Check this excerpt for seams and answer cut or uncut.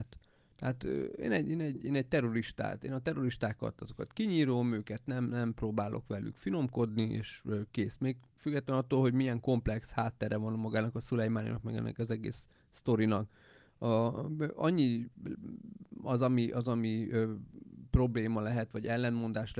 uncut